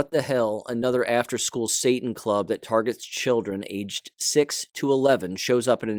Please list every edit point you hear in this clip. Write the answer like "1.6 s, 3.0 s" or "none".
none

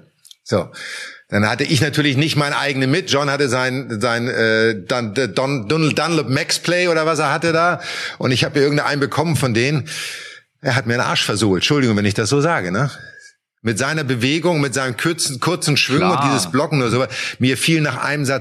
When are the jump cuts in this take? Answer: none

